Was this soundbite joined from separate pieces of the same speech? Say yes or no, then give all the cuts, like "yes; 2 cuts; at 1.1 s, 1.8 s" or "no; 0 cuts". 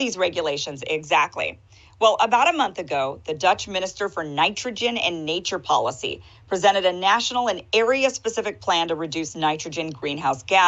no; 0 cuts